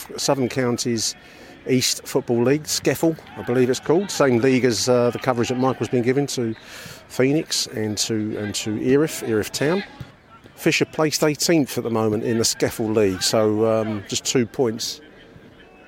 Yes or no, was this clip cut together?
no